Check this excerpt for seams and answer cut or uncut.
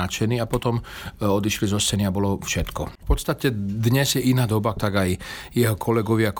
cut